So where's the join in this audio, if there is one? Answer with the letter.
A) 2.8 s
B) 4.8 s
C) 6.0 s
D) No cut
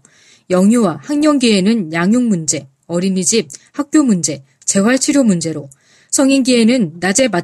D